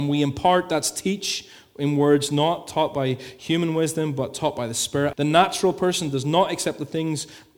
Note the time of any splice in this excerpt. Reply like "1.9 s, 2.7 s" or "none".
5.1 s

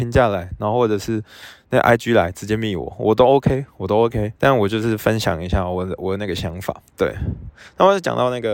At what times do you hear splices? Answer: 4.4 s, 6.9 s

